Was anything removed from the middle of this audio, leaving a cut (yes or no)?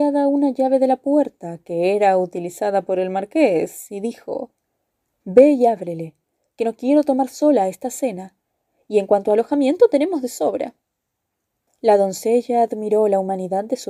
no